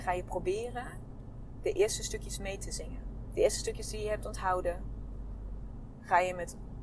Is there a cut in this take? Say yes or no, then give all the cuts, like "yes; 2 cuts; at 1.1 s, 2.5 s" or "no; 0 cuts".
no; 0 cuts